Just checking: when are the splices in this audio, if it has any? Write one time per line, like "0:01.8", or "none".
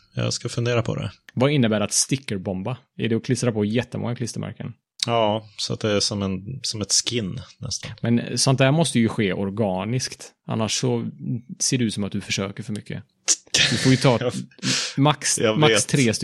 none